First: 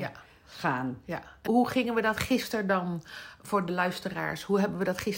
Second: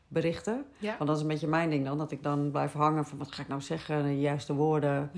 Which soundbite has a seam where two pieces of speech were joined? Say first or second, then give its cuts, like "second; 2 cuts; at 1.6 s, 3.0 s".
first; 1 cut; at 1.5 s